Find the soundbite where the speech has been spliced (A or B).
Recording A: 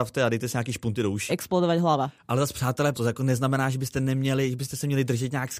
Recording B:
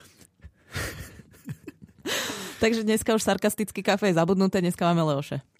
A